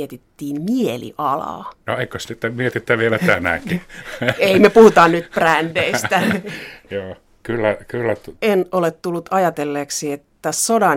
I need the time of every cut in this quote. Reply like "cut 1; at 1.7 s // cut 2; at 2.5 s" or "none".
cut 1; at 1.8 s // cut 2; at 8.3 s